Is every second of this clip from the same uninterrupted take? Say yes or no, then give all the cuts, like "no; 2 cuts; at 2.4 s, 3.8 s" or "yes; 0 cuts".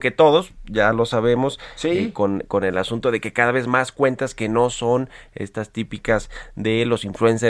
yes; 0 cuts